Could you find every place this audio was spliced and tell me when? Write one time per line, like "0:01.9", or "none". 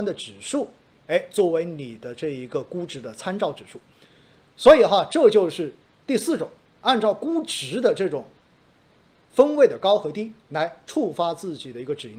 0:10.4